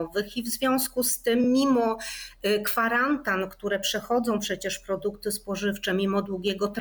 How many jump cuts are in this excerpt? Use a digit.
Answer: 0